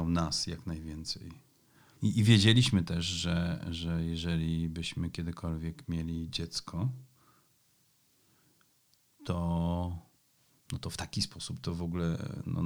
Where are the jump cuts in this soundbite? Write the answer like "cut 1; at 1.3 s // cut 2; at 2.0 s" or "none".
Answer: cut 1; at 2.0 s